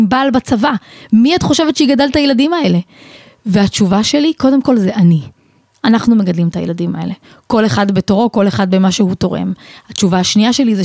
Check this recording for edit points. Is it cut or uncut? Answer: uncut